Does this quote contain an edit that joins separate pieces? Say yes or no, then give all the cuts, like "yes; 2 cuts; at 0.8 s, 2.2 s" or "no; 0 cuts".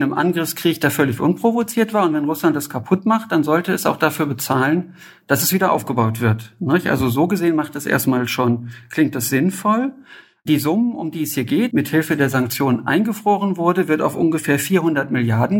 yes; 1 cut; at 11.7 s